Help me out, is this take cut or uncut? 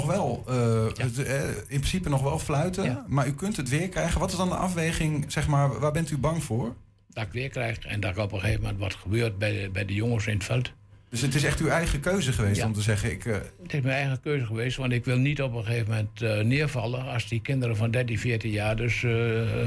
uncut